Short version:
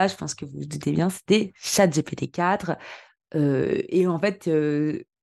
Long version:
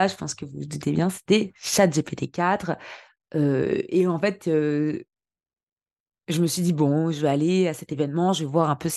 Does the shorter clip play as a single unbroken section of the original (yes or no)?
yes